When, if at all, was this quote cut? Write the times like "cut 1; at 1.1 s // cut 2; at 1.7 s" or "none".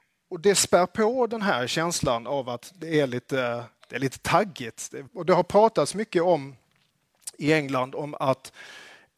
cut 1; at 5.1 s

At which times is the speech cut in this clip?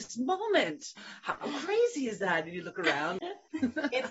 none

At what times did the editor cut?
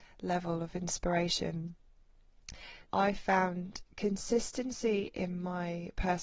cut 1; at 2.8 s

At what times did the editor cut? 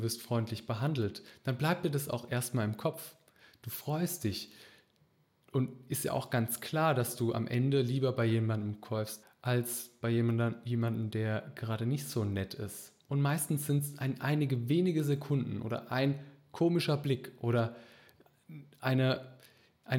cut 1; at 9.2 s

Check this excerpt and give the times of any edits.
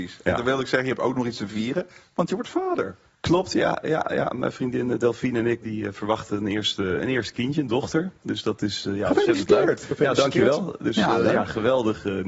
cut 1; at 5.6 s

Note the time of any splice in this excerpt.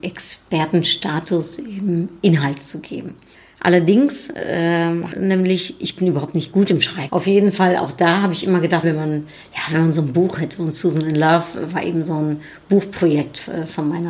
cut 1; at 5.1 s // cut 2; at 7.1 s // cut 3; at 8.8 s

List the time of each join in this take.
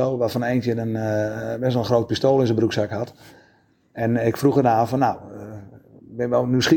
none

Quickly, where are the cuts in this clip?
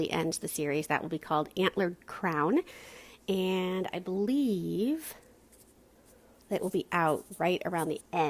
none

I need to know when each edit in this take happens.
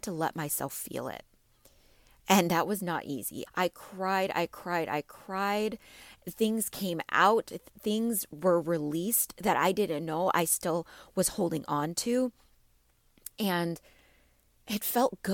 cut 1; at 3.5 s

